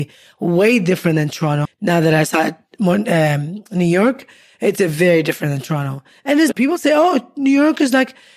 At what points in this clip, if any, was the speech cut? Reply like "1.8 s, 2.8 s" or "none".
1.6 s, 6.5 s